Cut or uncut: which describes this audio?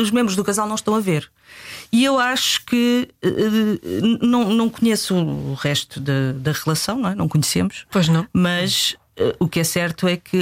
uncut